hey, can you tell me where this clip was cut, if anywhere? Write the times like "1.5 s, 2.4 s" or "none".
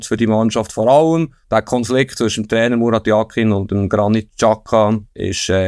1.4 s